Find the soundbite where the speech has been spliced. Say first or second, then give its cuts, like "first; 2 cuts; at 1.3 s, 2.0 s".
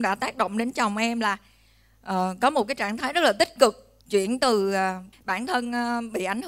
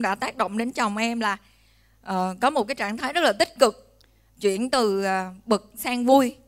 first; 2 cuts; at 4.0 s, 5.1 s